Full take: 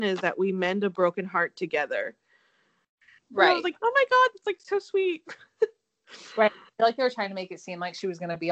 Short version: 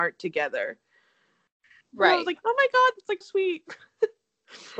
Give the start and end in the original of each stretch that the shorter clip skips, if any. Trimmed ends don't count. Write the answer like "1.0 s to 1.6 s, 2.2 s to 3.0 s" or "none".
4.6 s to 4.8 s

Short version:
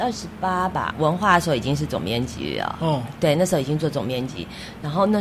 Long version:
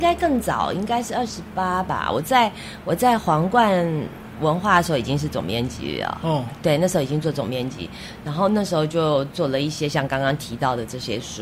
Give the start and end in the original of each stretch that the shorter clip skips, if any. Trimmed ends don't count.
2.1 s to 4.3 s

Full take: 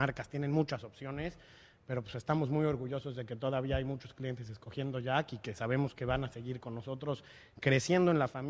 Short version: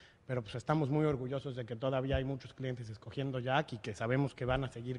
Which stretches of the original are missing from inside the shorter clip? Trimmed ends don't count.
none

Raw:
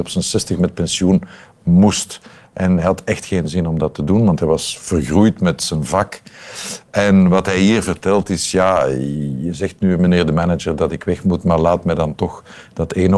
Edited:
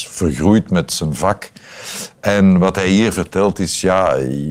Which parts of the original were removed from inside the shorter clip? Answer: none

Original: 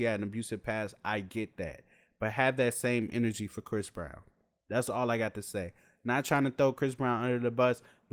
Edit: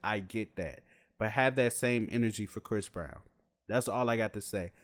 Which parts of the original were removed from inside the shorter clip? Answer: none

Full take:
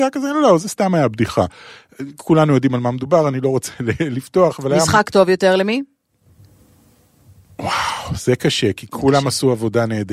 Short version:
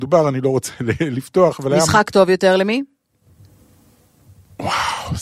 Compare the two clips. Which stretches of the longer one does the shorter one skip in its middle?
none

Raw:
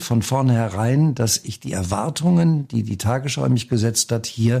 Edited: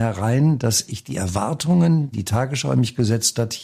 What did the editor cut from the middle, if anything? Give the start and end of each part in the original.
2.7 s to 2.8 s

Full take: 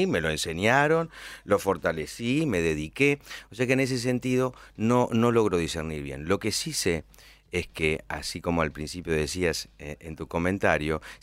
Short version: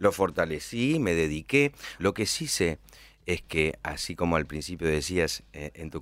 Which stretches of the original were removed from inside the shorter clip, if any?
3.5 s to 6.2 s

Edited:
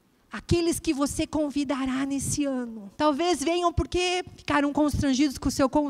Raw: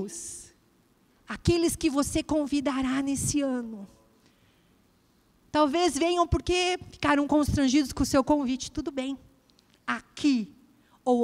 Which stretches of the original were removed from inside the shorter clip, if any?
3.9 s to 5.5 s

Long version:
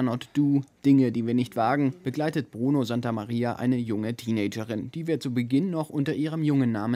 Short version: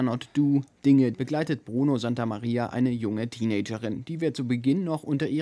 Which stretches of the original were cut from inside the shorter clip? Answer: 1.1 s to 2.0 s

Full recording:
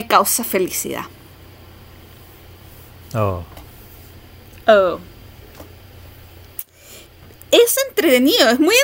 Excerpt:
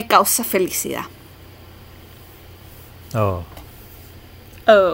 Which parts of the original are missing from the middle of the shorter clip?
none

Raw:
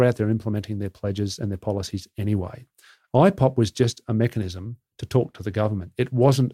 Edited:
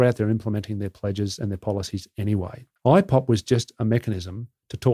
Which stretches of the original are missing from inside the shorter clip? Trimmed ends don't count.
2.8 s to 3.0 s

